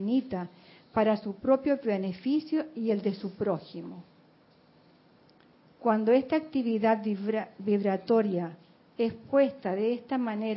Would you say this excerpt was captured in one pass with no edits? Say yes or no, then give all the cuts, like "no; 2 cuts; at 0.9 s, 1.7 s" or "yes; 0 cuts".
yes; 0 cuts